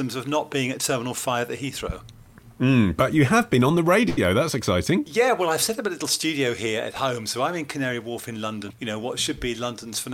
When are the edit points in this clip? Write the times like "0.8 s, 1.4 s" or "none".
8.7 s